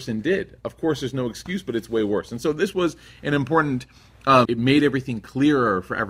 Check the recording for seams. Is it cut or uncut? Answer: cut